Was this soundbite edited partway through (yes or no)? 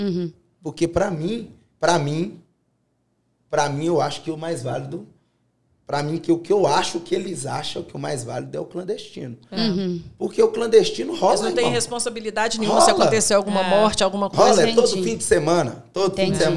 no